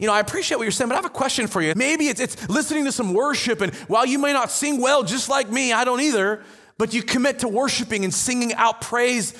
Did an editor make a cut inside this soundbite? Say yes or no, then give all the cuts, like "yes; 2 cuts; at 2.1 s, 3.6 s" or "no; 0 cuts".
yes; 1 cut; at 1.7 s